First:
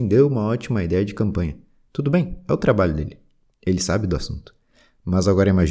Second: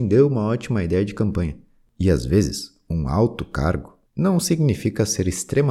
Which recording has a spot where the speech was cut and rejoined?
second; 2 cuts; at 1.9 s, 4.1 s

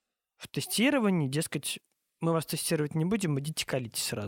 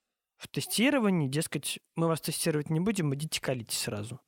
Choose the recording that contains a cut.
second; 1 cut; at 1.9 s

